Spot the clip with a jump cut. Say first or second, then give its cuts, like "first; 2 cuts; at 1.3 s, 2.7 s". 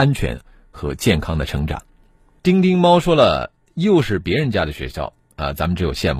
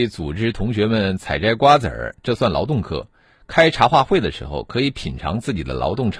first; 1 cut; at 2.4 s